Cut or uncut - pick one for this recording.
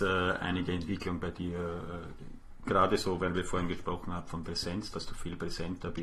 cut